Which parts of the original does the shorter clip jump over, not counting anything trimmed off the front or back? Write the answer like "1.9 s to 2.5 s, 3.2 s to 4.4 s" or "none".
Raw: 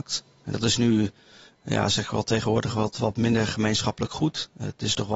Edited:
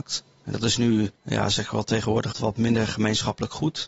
1.1 s to 1.5 s, 2.7 s to 2.9 s